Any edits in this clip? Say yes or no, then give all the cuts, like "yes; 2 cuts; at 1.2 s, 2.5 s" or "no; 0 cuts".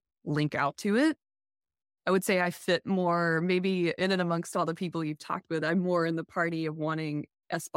no; 0 cuts